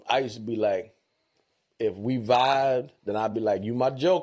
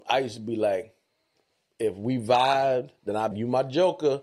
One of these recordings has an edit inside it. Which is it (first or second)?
second